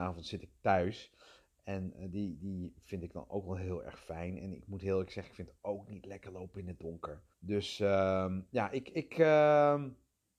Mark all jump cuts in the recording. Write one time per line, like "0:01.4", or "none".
0:07.3